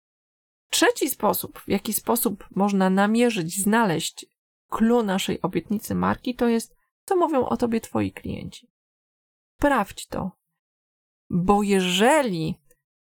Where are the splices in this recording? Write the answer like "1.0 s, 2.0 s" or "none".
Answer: none